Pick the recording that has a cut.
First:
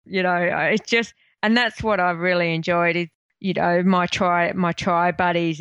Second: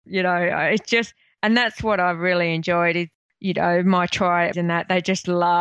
second; 1 cut; at 4.5 s

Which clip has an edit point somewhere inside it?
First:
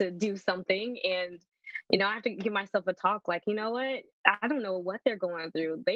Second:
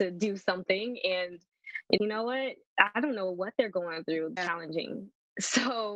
second; 2 cuts; at 2.0 s, 4.4 s

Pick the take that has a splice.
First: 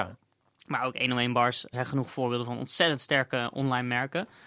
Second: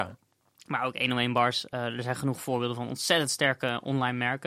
first; 1 cut; at 1.7 s

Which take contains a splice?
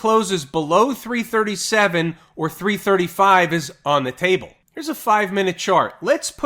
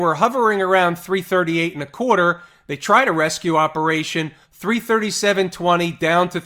second; 1 cut; at 4.4 s

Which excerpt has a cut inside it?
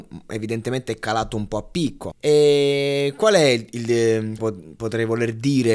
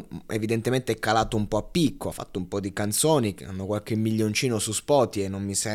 first; 2 cuts; at 2.1 s, 4.4 s

